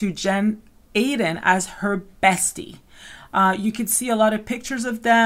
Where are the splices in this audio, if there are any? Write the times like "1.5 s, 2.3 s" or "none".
none